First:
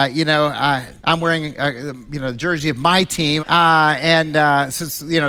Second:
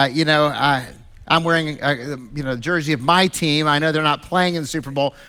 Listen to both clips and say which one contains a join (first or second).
first